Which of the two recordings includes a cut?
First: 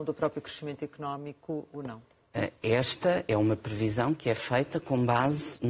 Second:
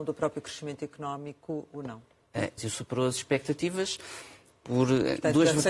second; 1 cut; at 2.6 s

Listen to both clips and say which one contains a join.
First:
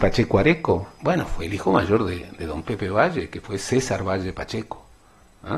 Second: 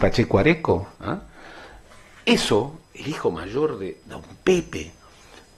second; 2 cuts; at 0.9 s, 2.8 s

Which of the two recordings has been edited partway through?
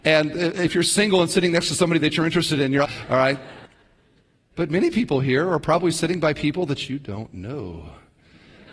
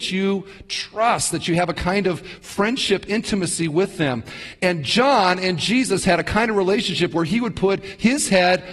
first; 1 cut; at 2.8 s

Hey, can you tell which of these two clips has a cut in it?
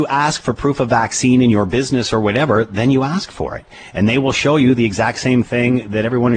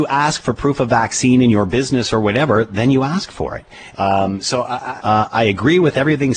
second; 2 cuts; at 3.9 s, 5.0 s

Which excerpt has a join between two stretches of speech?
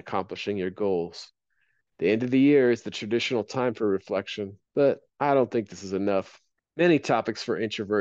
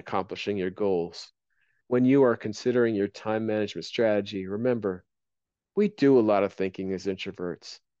first; 3 cuts; at 1.9 s, 4.7 s, 6.6 s

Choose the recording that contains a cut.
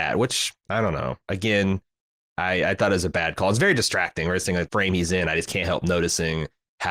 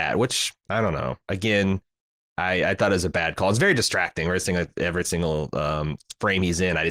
first; 1 cut; at 4.7 s

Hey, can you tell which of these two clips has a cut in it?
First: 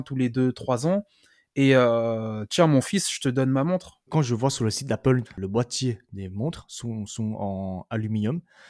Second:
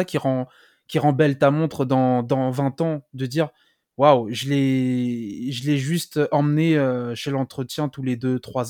first; 2 cuts; at 4.1 s, 5.3 s

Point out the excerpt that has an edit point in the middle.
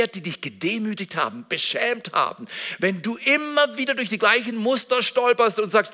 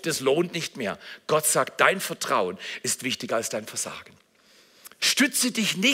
second; 1 cut; at 5.0 s

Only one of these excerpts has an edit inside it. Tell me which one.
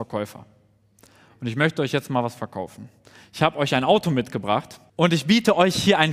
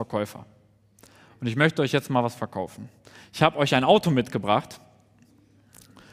first; 1 cut; at 4.9 s

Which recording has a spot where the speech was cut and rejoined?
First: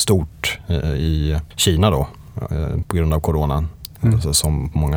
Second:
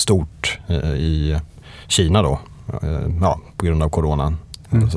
first; 2 cuts; at 1.5 s, 2.8 s

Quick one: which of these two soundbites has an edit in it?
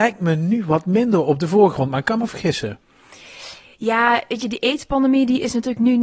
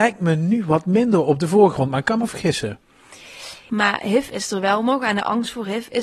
second; 1 cut; at 3.7 s

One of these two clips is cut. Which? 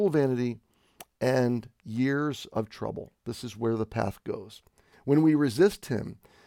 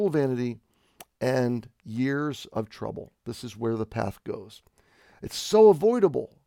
first; 1 cut; at 4.9 s

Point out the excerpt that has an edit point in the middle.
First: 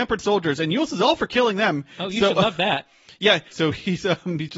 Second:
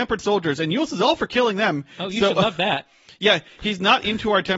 first; 1 cut; at 3.5 s

